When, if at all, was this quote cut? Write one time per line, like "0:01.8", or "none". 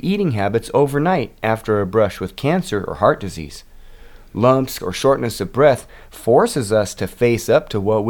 0:04.8